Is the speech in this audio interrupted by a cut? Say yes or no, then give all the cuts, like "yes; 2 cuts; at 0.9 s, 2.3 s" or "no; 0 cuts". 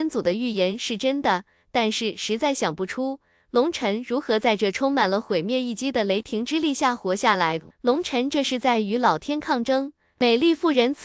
yes; 1 cut; at 7.7 s